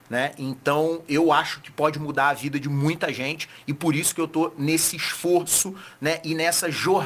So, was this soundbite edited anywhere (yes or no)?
no